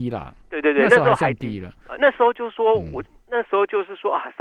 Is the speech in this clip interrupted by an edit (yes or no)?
no